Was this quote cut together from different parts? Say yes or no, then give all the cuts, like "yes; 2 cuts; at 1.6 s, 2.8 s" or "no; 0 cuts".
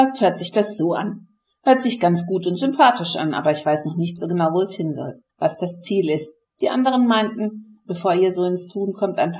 yes; 2 cuts; at 5.3 s, 7.9 s